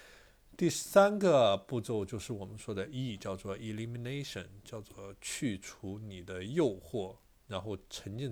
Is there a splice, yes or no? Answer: no